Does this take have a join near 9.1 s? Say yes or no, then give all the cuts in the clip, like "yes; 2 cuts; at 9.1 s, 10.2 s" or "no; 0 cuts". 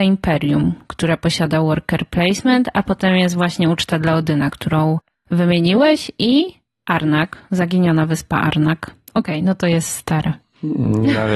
yes; 1 cut; at 9.1 s